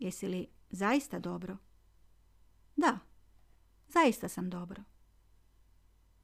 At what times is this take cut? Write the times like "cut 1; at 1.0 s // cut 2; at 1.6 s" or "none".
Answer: none